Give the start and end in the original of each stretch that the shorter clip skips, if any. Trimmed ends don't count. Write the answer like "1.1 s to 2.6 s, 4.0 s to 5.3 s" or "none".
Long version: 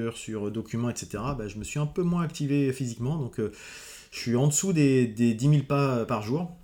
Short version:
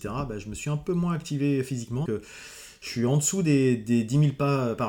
3.1 s to 3.4 s